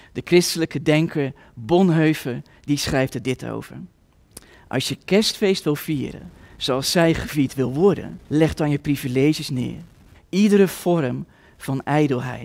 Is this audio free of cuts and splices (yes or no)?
no